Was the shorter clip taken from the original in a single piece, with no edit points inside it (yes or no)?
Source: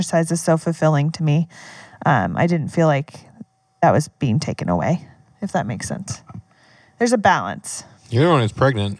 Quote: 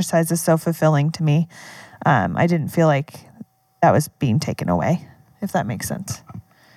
yes